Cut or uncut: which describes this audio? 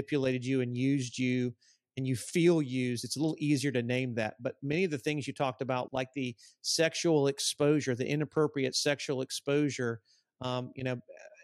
cut